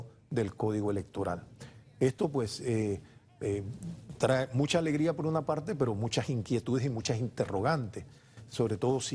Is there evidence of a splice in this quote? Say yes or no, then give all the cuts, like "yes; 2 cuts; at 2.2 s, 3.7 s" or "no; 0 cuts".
no; 0 cuts